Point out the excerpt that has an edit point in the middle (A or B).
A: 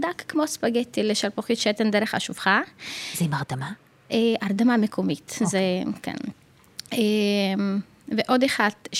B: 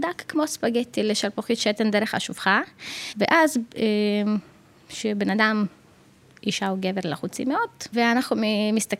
B